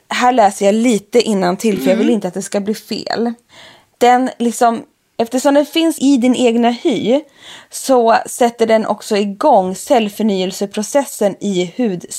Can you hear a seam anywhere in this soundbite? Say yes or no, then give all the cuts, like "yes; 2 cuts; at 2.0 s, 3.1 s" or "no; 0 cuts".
no; 0 cuts